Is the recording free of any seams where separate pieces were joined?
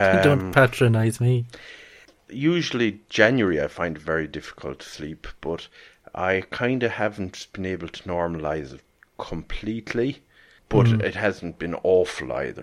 yes; 0 cuts

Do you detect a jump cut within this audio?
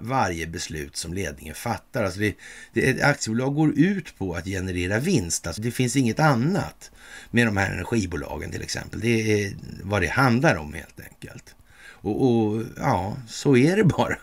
yes; 1 cut; at 5.6 s

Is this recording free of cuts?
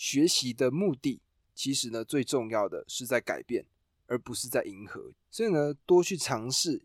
yes; 0 cuts

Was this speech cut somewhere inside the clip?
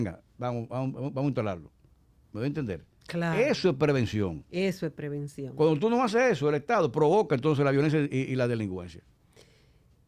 no; 0 cuts

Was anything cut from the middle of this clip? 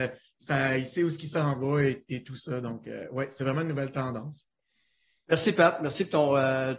no; 0 cuts

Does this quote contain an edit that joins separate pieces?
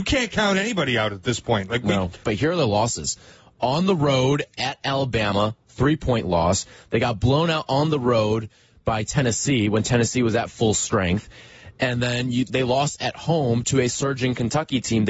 yes; 1 cut; at 2.2 s

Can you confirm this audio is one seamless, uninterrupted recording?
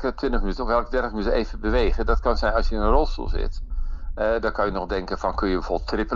yes; 0 cuts

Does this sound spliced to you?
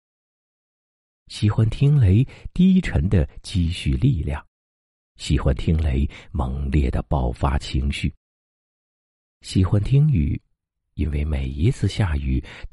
yes; 2 cuts; at 1.2 s, 9.3 s

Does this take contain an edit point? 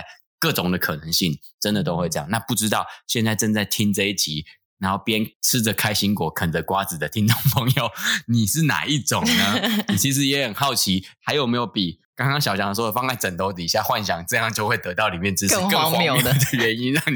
yes; 1 cut; at 12.0 s

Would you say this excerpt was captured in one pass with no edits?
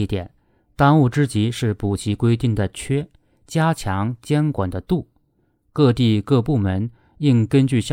yes; 0 cuts

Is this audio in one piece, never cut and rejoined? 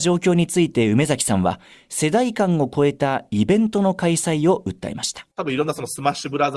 no; 1 cut; at 5.3 s

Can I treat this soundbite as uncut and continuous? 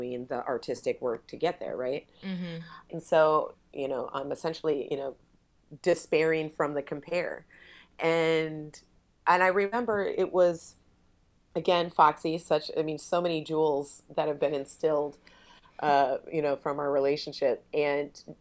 no; 1 cut; at 2.9 s

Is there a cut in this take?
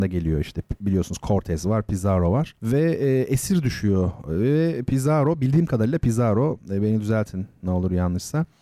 yes; 1 cut; at 2.6 s

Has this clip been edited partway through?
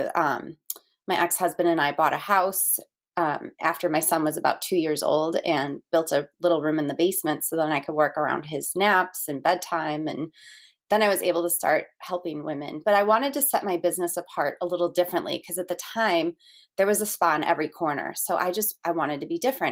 no; 0 cuts

